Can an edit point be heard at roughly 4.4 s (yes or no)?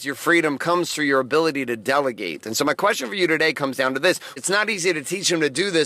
yes